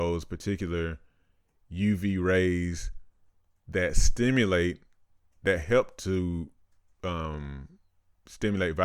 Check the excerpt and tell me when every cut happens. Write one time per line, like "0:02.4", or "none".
none